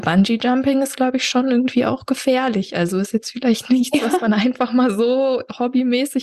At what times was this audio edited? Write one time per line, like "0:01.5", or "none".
none